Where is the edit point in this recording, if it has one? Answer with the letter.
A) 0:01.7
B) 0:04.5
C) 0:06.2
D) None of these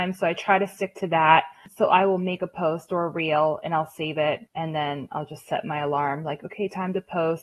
B